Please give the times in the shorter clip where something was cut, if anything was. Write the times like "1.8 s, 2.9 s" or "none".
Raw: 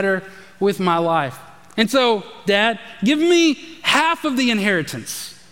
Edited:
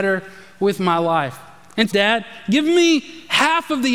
1.9 s